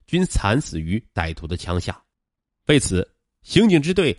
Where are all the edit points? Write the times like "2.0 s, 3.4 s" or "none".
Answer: 2.5 s